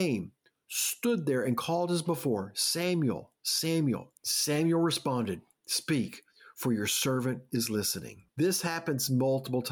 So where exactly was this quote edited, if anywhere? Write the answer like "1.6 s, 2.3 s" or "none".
4.2 s, 8.3 s